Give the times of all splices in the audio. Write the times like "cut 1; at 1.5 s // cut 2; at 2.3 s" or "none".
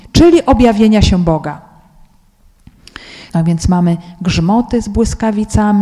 cut 1; at 3.3 s